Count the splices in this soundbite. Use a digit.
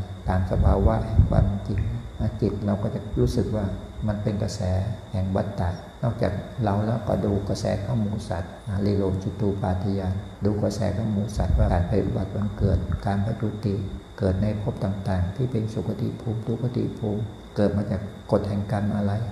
1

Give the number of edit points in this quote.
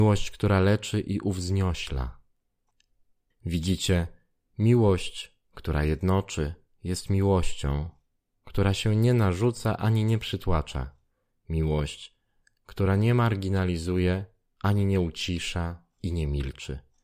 1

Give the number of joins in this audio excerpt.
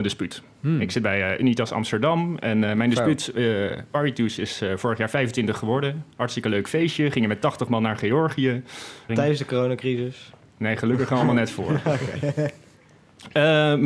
1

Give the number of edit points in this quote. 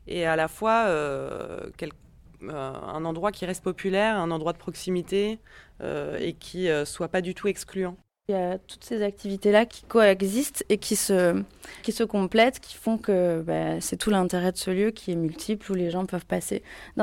3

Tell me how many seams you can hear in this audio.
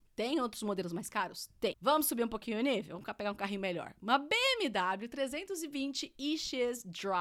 1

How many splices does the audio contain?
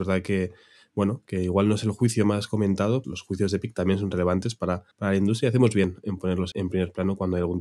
3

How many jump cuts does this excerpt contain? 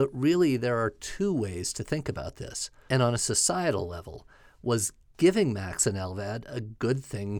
1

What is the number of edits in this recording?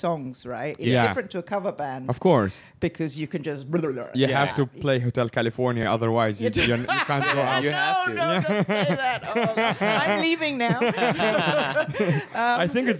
0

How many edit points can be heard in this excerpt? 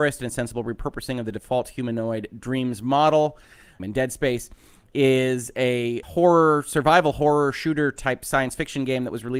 2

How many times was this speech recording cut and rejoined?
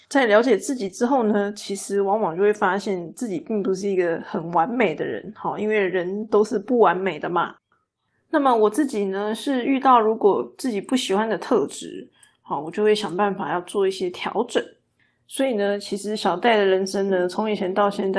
0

